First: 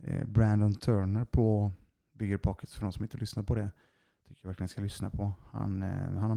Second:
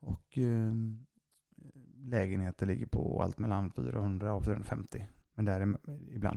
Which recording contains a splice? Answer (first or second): second